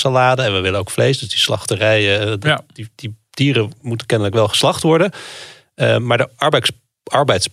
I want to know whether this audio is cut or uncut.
uncut